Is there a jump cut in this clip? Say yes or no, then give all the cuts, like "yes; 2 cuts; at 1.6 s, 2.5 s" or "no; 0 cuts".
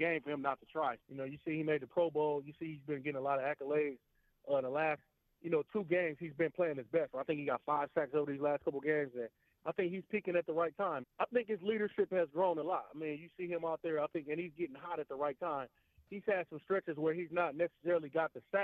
yes; 2 cuts; at 1.0 s, 11.0 s